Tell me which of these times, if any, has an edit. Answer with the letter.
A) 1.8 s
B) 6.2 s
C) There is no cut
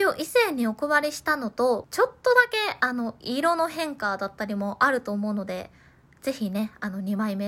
A